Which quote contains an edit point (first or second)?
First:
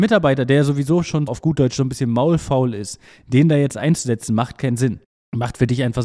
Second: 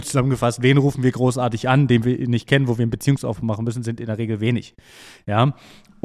first